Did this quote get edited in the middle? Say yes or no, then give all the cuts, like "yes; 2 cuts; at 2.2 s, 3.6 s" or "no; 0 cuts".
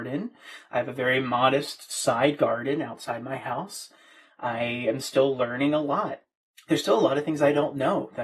no; 0 cuts